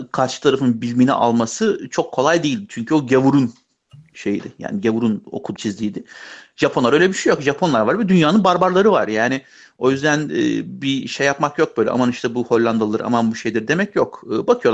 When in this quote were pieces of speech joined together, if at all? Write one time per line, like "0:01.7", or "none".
0:05.6

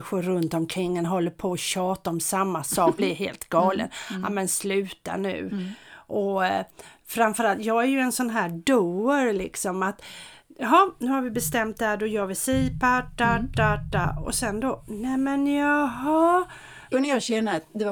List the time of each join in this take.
0:03.0
0:16.9

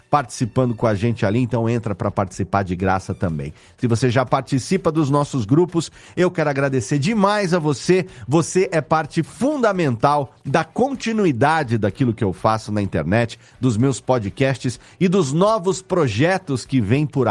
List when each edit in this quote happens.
none

